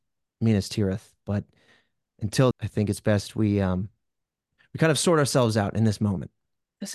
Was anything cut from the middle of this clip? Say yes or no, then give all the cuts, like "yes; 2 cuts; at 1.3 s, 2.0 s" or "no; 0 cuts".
yes; 1 cut; at 2.5 s